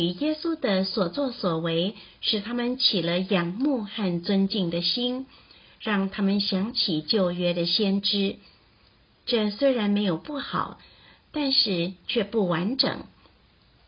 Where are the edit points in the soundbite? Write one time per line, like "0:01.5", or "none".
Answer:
none

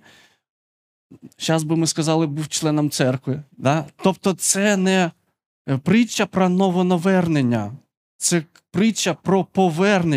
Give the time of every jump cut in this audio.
0:03.5

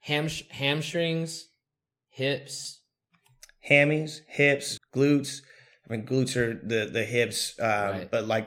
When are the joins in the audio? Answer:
0:04.8

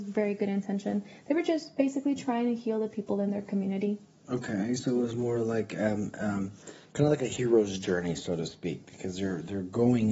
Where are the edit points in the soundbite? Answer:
none

